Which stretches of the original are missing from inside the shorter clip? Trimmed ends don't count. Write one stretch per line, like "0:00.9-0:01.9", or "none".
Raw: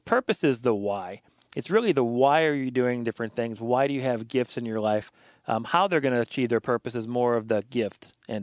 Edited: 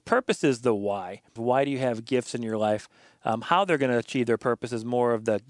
0:01.4-0:03.6